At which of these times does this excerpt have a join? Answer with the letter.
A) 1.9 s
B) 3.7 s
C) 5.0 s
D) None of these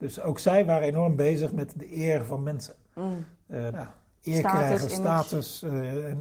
B